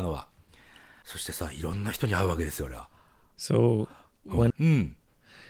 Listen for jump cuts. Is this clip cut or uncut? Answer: cut